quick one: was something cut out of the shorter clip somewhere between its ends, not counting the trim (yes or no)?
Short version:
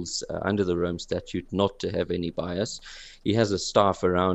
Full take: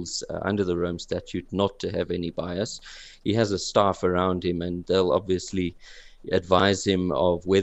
no